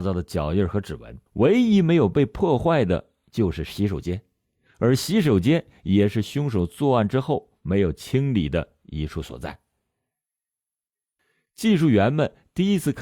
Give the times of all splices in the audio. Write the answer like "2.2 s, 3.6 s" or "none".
1.3 s